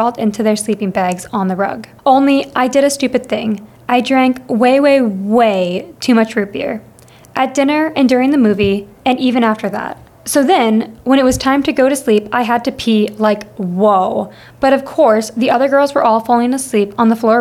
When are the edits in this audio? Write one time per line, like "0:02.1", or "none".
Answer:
0:02.0